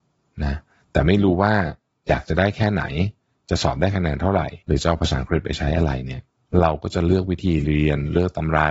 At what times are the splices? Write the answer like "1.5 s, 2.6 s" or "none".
4.6 s